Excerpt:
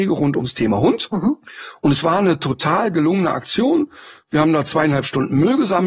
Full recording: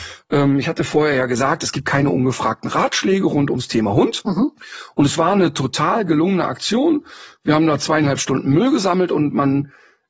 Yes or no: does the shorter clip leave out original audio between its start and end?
no